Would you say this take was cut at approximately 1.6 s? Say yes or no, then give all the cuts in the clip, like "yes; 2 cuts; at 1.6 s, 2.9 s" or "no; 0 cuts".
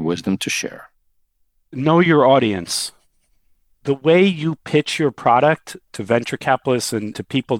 no; 0 cuts